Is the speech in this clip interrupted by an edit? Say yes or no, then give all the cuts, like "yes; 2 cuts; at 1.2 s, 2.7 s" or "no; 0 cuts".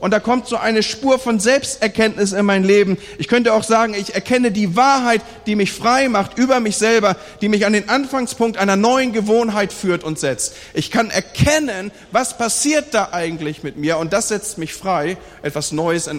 no; 0 cuts